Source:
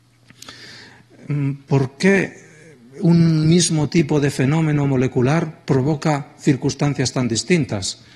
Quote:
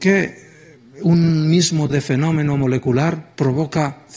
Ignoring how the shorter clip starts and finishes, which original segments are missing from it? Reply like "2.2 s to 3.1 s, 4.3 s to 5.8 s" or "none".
3.9 s to 4.2 s